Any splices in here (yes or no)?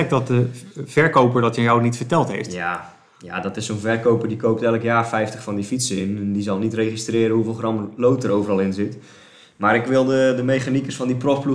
no